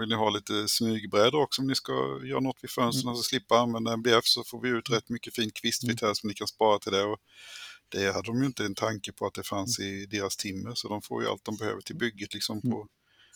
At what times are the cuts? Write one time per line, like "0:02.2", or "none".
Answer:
none

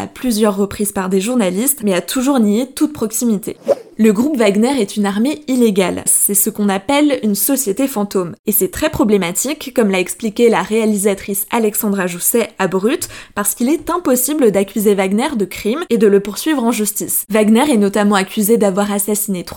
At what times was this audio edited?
0:06.1

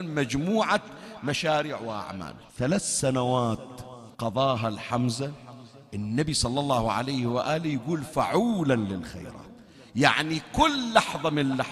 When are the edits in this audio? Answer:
0:02.5
0:04.1

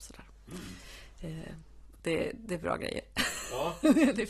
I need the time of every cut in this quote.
0:02.0

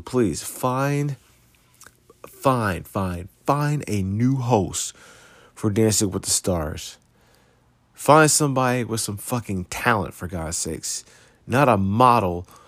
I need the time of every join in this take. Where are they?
none

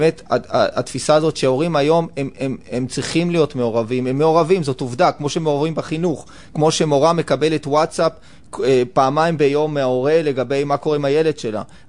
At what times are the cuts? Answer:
none

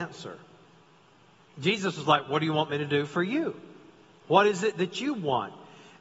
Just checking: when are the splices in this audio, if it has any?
none

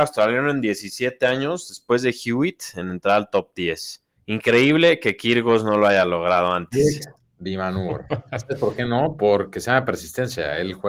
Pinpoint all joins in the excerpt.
none

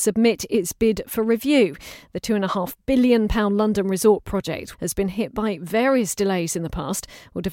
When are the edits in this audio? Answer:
0:04.7

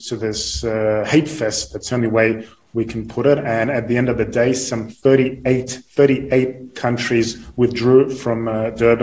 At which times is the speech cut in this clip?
0:05.9

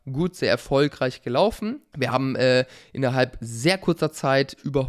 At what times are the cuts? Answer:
0:01.9

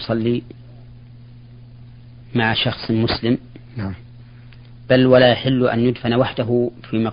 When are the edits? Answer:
none

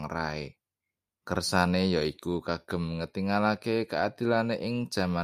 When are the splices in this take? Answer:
0:01.2

